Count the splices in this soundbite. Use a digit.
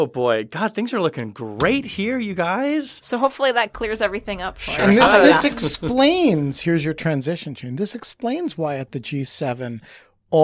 0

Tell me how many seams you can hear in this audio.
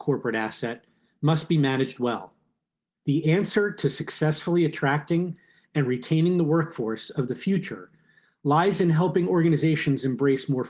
1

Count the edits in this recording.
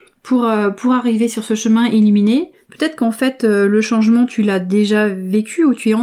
0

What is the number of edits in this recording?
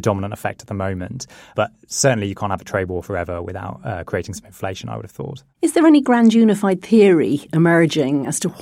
0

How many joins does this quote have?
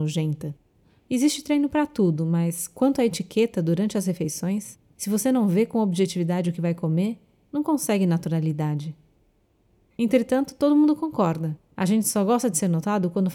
1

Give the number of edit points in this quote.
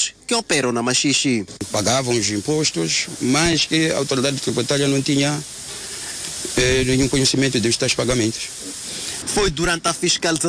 1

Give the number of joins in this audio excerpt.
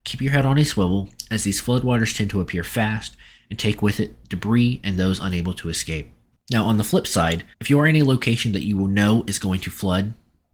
2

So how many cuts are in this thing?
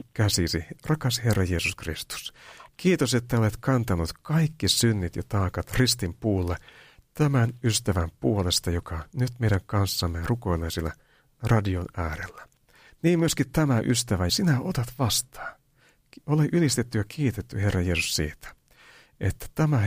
2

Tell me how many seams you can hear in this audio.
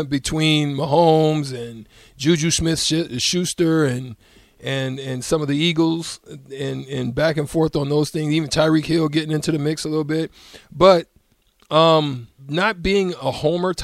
1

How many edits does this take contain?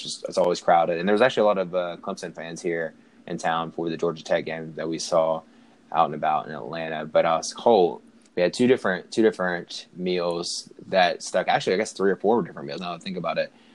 2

